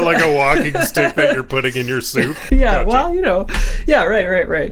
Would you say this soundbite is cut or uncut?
cut